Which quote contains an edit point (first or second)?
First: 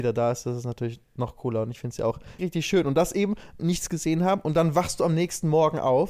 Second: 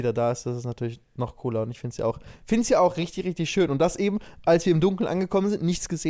first